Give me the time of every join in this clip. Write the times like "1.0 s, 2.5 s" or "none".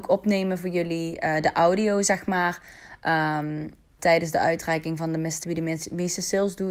4.0 s, 5.4 s